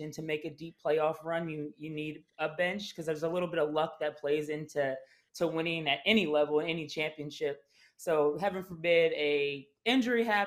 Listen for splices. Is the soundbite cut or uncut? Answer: uncut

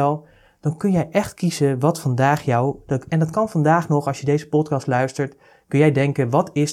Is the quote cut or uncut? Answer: uncut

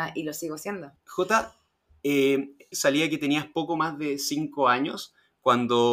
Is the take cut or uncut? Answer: cut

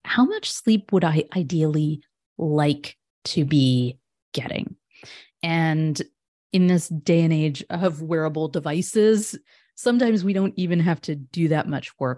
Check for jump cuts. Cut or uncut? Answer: uncut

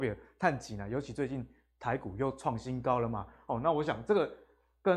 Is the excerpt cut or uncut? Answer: uncut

